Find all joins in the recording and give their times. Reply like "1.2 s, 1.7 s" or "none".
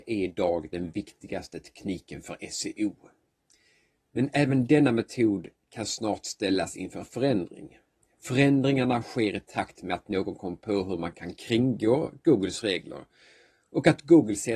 none

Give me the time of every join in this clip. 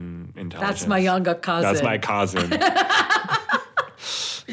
none

